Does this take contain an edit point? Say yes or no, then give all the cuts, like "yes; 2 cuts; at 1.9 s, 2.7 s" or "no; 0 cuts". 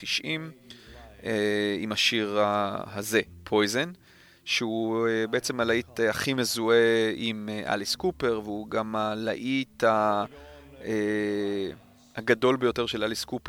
no; 0 cuts